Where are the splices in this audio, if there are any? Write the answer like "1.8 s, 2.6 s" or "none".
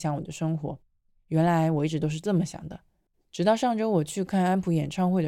none